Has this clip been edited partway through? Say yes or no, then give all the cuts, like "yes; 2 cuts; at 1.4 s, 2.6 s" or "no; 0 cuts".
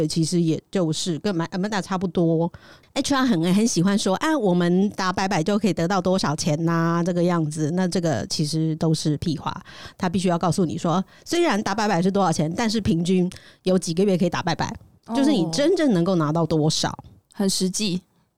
no; 0 cuts